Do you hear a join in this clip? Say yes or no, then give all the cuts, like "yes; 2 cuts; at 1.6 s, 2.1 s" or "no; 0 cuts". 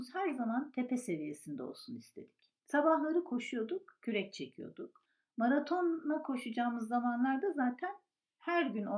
yes; 1 cut; at 2.6 s